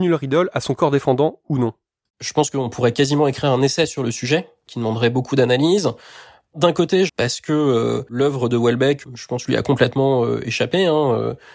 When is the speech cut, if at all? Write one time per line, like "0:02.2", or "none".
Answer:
0:07.1